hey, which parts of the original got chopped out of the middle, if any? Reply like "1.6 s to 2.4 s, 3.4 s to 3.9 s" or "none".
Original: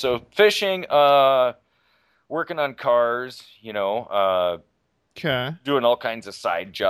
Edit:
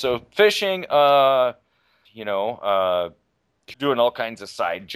2.1 s to 3.5 s, 5.2 s to 5.6 s